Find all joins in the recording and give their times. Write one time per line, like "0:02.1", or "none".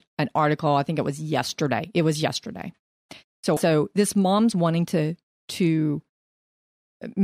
0:03.6